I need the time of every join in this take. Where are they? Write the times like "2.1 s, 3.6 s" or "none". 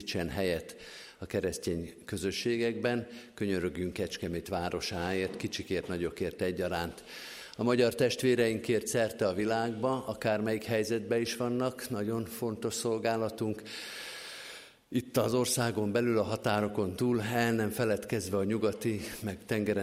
none